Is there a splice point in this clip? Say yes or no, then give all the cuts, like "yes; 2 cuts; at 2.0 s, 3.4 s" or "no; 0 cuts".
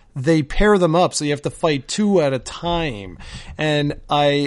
no; 0 cuts